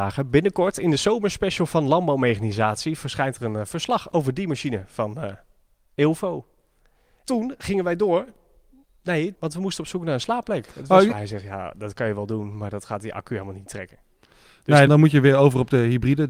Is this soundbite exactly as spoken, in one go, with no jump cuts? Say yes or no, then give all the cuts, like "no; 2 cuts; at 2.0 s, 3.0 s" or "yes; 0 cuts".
no; 3 cuts; at 9.3 s, 11.1 s, 14.9 s